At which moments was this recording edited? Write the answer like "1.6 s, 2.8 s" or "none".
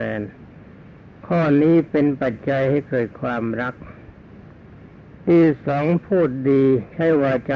none